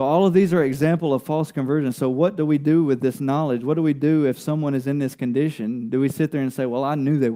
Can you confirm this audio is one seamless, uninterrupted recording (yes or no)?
yes